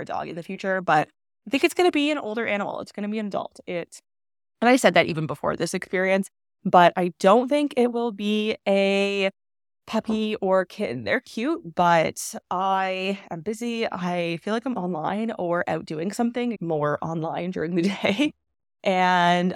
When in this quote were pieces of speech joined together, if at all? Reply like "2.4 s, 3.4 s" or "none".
14.8 s, 16.6 s